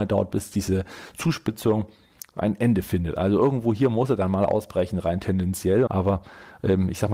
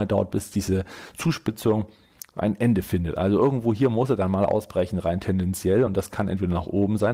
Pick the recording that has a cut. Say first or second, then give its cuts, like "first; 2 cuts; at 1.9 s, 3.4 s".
first; 1 cut; at 5.9 s